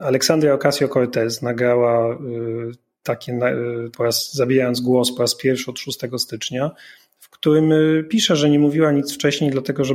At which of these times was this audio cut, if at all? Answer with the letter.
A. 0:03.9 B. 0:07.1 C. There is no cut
A